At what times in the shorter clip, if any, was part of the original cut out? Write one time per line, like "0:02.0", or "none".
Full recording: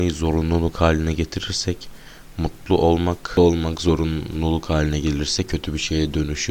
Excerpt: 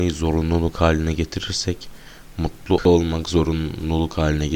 0:02.8